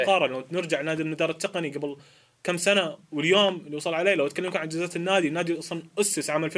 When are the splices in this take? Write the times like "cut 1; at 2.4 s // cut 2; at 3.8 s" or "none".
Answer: none